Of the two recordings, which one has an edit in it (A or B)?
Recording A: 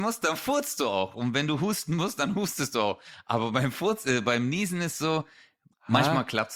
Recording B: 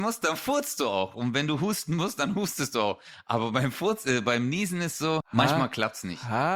B